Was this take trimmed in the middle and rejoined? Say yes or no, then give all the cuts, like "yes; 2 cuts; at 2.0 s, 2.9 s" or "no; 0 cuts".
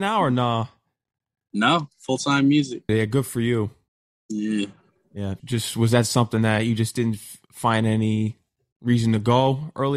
yes; 2 cuts; at 2.9 s, 5.4 s